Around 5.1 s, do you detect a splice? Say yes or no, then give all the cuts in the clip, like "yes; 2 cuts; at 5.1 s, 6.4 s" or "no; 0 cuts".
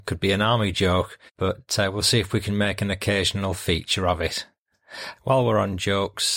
yes; 2 cuts; at 1.3 s, 5.1 s